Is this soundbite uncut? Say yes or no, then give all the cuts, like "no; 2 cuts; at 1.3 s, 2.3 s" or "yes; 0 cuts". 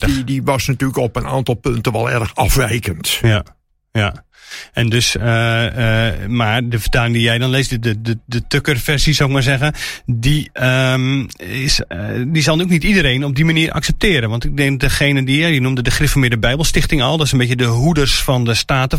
yes; 0 cuts